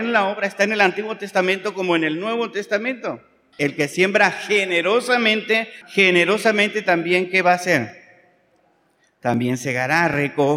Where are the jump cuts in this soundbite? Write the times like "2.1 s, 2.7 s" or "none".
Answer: 3.6 s, 5.8 s